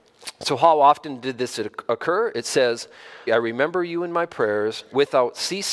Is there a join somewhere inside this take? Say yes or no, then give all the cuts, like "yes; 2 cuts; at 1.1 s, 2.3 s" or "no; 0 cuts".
yes; 1 cut; at 3.3 s